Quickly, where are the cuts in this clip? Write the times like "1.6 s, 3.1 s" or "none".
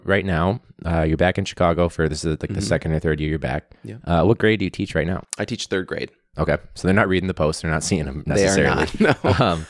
none